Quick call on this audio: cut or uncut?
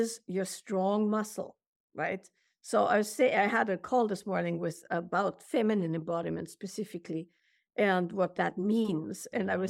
uncut